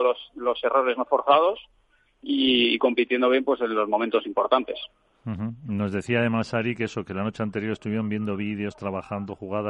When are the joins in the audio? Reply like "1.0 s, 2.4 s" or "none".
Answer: none

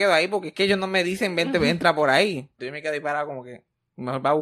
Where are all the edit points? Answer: 2.6 s

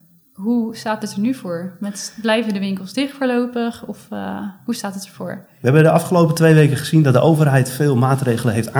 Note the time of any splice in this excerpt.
none

